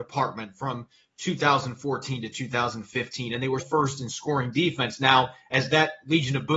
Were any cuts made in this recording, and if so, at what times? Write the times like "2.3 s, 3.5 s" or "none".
3.6 s